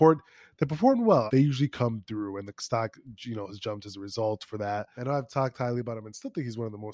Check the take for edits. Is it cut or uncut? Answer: cut